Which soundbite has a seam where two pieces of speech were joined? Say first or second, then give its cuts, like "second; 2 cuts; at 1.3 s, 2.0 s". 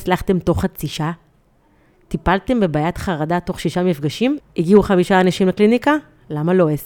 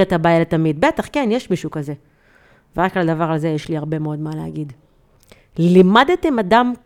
first; 1 cut; at 4.4 s